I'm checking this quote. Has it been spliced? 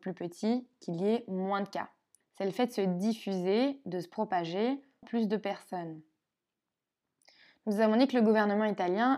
yes; 2 cuts; at 2.2 s, 5.0 s

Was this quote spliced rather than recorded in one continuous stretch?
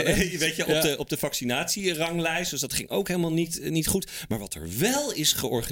no; 0 cuts

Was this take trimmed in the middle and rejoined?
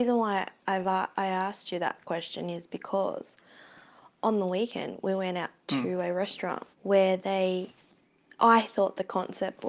yes; 1 cut; at 6.7 s

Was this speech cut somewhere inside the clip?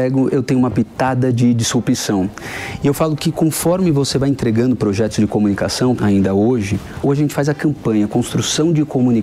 yes; 2 cuts; at 6.0 s, 7.0 s

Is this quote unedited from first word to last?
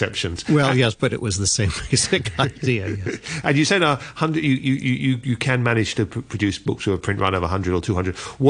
yes; 0 cuts

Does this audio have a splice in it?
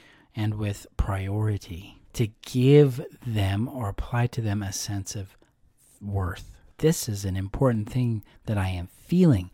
yes; 2 cuts; at 2.1 s, 6.7 s

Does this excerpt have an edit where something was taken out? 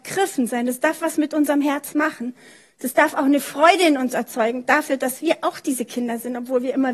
no; 0 cuts

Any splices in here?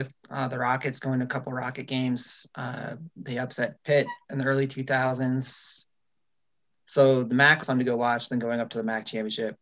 yes; 1 cut; at 7.6 s

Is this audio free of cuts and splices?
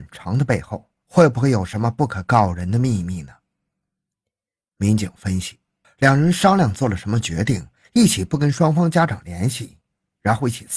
no; 1 cut; at 5.8 s

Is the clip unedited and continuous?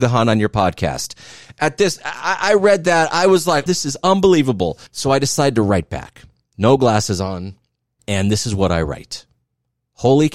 no; 2 cuts; at 3.7 s, 4.9 s

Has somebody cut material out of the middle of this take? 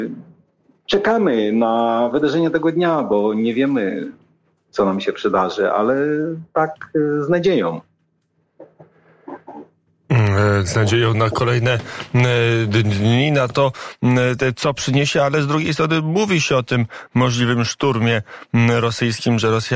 no; 0 cuts

